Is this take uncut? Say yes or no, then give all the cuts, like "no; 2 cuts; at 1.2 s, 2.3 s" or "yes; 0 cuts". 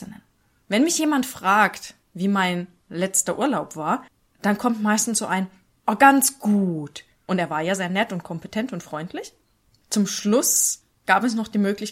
no; 2 cuts; at 5.7 s, 7.1 s